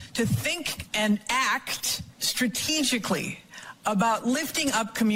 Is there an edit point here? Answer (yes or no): yes